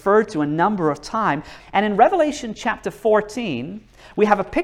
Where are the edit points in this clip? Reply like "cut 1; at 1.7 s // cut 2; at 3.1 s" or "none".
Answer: cut 1; at 1.6 s